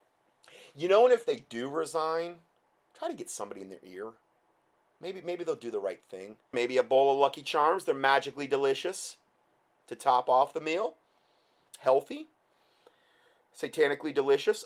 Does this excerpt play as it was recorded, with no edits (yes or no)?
no